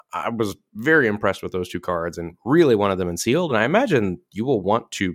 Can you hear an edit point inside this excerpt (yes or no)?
no